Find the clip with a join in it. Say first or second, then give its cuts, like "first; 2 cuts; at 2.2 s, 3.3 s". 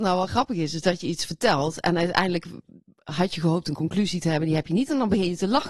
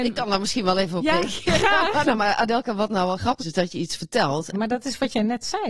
second; 3 cuts; at 2.0 s, 3.4 s, 4.5 s